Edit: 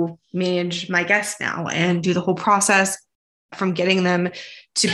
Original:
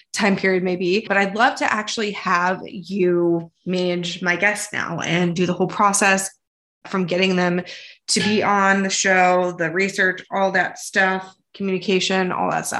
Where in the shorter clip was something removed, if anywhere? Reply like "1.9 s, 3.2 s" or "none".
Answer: none